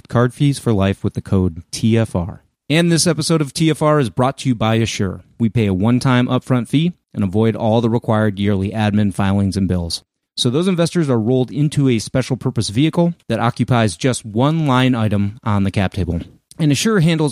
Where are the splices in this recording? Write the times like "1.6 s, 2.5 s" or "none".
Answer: 5.4 s, 10.3 s